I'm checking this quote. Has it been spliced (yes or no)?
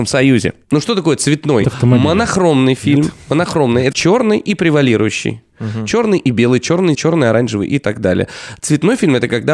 yes